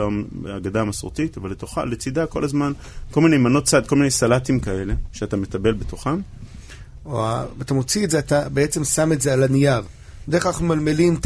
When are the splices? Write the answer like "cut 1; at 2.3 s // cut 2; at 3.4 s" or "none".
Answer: cut 1; at 7.0 s // cut 2; at 10.2 s